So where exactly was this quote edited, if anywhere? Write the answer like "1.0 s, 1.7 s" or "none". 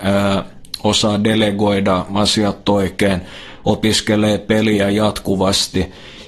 none